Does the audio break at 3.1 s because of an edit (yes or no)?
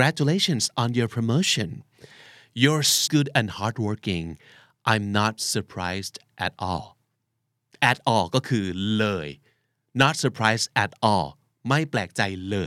yes